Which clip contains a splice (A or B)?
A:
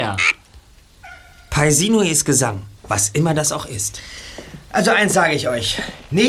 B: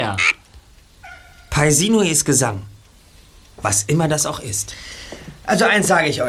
A